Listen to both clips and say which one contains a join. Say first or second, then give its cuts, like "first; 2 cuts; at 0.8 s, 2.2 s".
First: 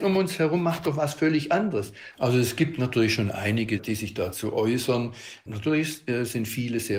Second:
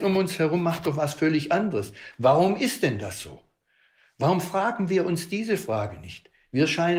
first; 1 cut; at 2.1 s